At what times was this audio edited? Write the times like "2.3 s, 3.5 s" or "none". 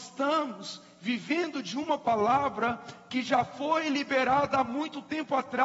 none

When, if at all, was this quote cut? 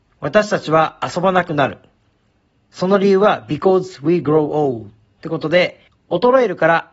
none

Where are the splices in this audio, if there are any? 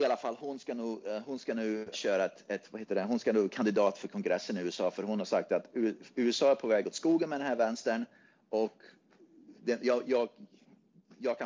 1.9 s

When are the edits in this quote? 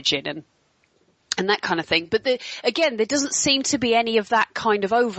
none

